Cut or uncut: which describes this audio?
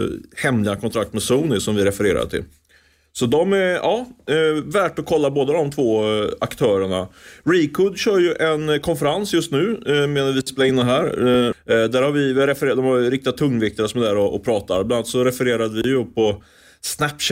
cut